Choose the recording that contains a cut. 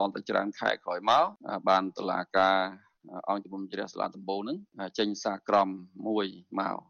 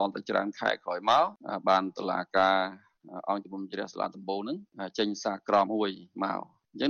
second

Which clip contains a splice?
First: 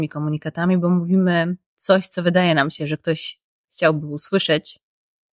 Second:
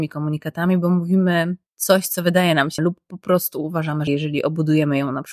second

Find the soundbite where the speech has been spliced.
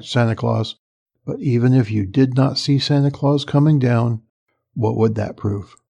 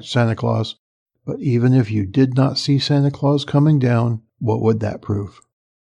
second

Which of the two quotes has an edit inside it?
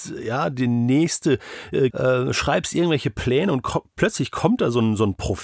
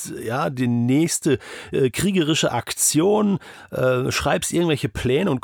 first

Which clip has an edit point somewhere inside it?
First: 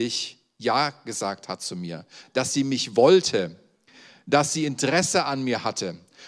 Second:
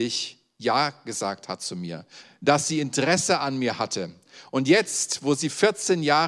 second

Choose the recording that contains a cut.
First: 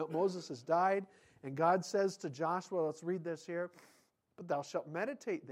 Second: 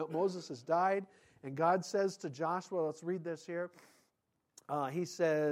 first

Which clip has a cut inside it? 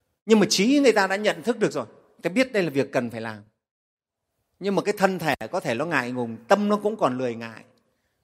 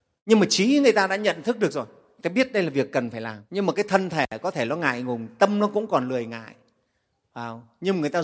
second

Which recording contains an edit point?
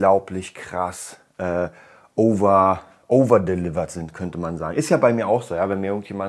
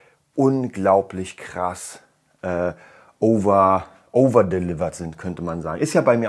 first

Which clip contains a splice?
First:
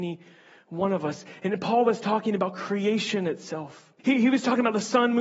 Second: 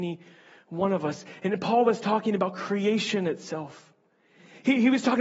first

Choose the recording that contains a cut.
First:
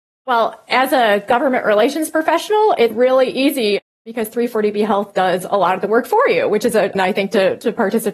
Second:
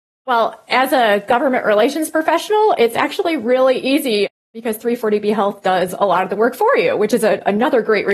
first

